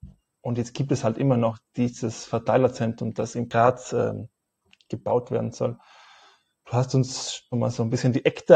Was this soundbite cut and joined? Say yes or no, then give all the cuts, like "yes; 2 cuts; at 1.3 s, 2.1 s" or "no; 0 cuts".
yes; 1 cut; at 7.5 s